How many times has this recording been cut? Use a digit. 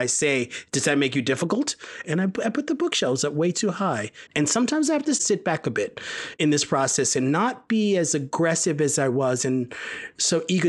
2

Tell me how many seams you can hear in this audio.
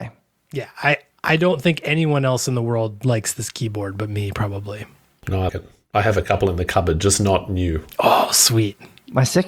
1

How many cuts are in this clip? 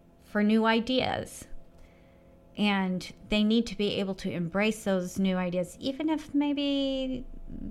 0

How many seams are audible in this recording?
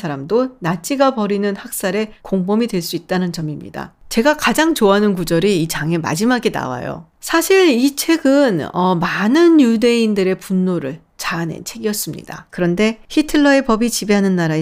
2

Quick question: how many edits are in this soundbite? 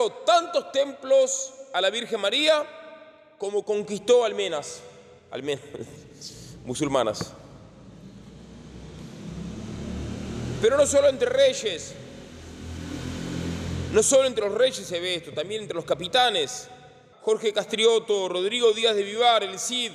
1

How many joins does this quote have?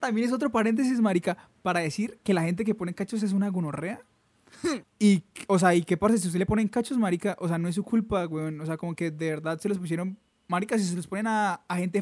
1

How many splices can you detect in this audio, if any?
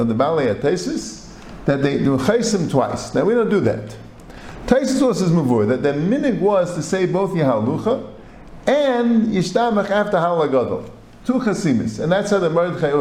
1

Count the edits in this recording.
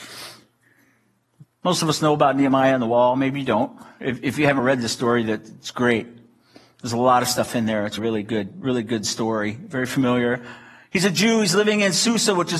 1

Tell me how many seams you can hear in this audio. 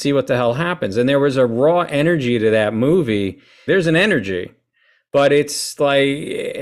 1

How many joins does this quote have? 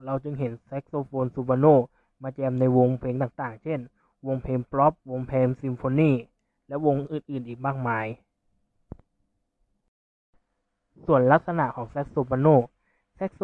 1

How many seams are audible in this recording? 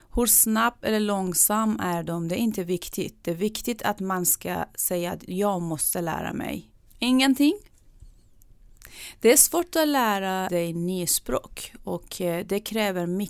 2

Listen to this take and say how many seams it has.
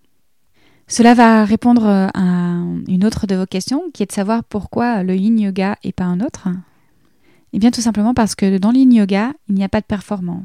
0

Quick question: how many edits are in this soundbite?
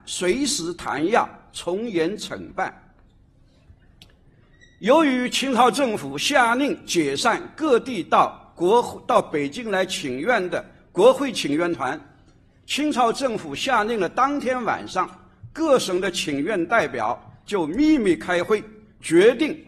0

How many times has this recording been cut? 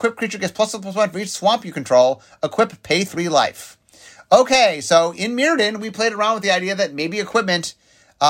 0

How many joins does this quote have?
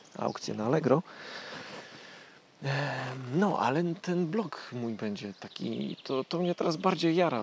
1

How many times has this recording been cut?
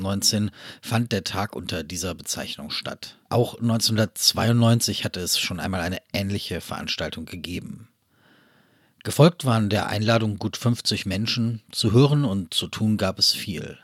1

